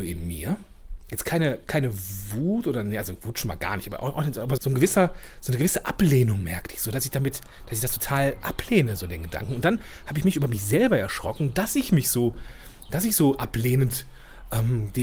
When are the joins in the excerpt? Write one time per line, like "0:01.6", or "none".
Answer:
0:04.6